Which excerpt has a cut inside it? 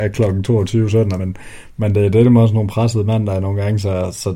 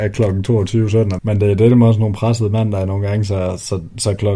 second; 1 cut; at 1.2 s

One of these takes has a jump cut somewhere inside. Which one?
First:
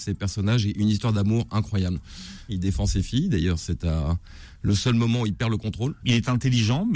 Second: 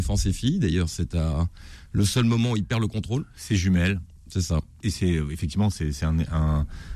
first; 2 cuts; at 2.5 s, 6.0 s

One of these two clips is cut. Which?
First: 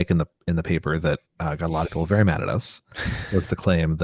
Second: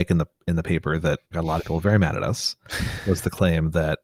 second; 1 cut; at 1.3 s

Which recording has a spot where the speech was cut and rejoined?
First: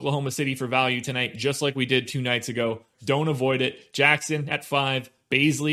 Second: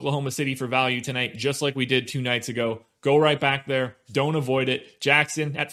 first; 1 cut; at 2.9 s

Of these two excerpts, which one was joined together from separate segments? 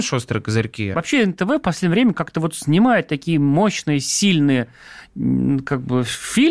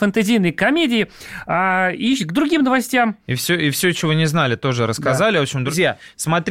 first; 1 cut; at 0.9 s

